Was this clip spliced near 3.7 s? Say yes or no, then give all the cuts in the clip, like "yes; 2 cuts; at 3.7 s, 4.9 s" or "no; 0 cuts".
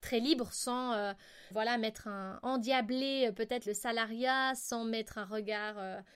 yes; 2 cuts; at 1.5 s, 3.7 s